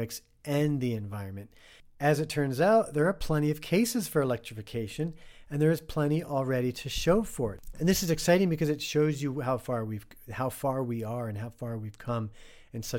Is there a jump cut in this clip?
no; 0 cuts

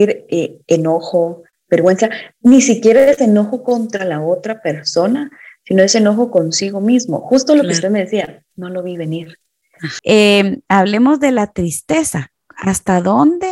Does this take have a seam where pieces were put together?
yes; 1 cut; at 10.0 s

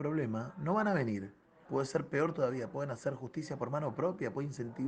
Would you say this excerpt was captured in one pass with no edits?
no; 1 cut; at 1.7 s

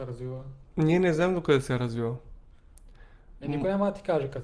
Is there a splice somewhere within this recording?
no; 0 cuts

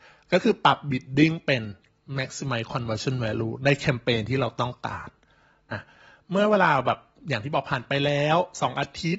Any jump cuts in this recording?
yes; 1 cut; at 5.7 s

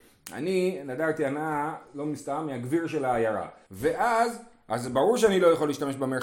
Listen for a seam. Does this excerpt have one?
yes; 1 cut; at 3.7 s

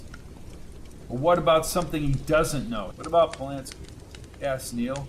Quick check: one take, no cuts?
no; 1 cut; at 2.9 s

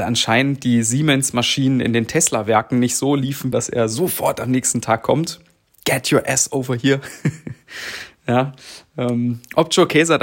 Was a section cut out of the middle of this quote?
yes; 1 cut; at 3.5 s

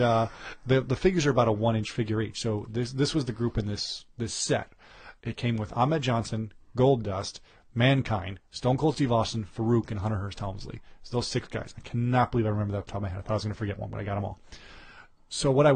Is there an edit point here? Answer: no; 0 cuts

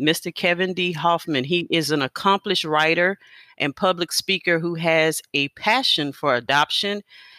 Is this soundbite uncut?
yes; 0 cuts

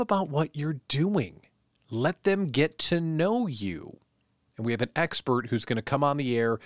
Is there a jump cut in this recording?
no; 0 cuts

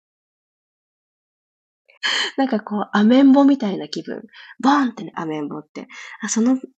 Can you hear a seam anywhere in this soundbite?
yes; 2 cuts; at 2.0 s, 5.1 s

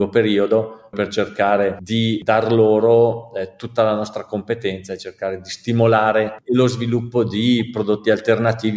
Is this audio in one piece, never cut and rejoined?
no; 1 cut; at 0.9 s

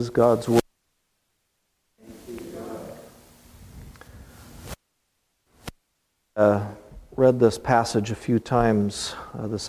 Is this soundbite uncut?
yes; 0 cuts

